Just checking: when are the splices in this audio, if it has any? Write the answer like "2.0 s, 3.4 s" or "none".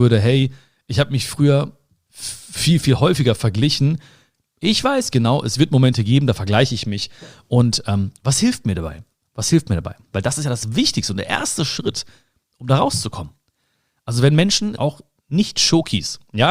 10.1 s, 14.8 s